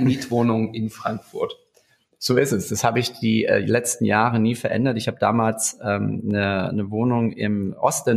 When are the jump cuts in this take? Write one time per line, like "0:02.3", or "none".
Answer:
none